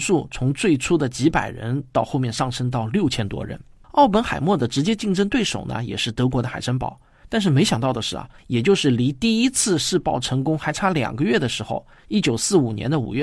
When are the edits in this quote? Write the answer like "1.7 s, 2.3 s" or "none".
3.8 s, 8.4 s